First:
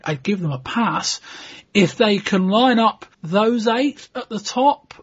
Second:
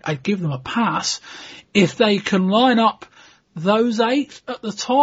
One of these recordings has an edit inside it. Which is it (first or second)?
first